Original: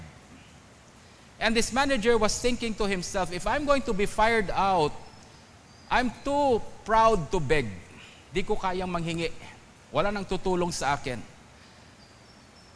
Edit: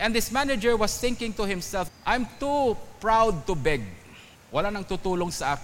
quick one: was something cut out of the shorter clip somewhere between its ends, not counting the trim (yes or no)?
yes